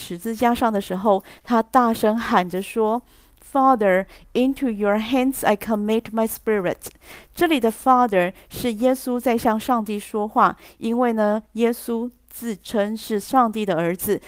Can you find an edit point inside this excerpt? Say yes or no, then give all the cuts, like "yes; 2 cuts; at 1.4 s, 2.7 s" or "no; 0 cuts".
no; 0 cuts